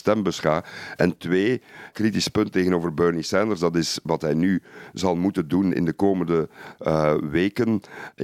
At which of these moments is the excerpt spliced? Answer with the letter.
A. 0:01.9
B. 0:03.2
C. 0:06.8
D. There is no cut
A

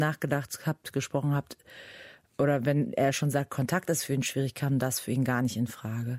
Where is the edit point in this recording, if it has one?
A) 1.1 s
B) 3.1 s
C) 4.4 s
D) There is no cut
D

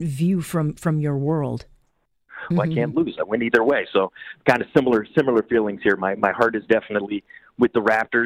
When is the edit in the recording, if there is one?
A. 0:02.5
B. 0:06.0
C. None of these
A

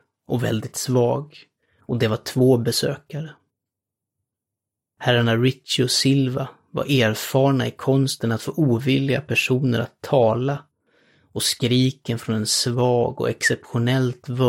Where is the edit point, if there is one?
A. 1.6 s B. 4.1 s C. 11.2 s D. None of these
D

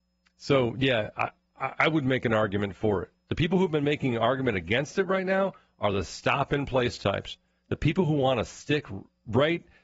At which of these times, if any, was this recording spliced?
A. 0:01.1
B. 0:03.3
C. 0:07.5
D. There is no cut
D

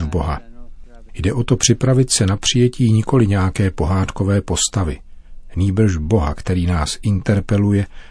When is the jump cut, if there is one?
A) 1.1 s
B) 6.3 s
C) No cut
A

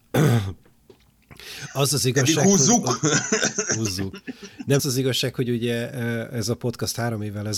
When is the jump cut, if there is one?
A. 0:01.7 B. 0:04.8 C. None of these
B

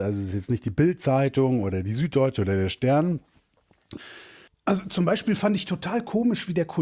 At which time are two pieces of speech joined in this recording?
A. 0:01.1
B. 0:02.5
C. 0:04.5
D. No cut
C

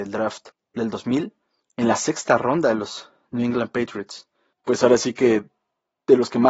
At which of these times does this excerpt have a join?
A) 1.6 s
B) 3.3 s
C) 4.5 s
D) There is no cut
C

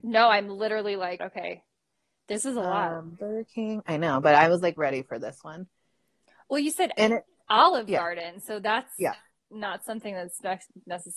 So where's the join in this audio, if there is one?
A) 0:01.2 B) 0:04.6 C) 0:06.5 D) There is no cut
A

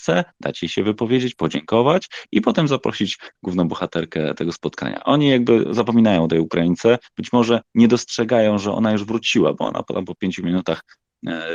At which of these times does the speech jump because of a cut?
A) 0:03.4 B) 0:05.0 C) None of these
A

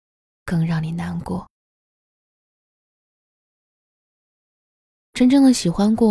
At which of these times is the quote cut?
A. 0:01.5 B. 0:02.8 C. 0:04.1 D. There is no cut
D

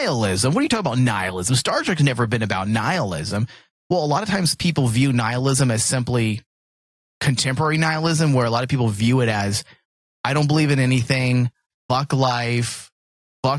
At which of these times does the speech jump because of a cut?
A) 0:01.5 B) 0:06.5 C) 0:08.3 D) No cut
D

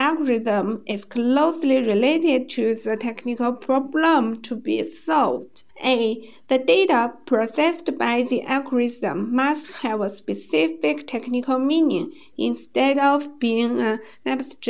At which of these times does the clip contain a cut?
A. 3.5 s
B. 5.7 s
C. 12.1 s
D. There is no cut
B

